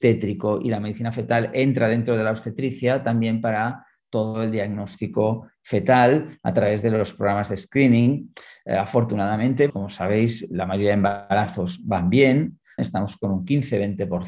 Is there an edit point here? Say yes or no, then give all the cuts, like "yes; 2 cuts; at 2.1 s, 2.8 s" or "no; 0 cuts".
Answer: yes; 2 cuts; at 9.7 s, 12.8 s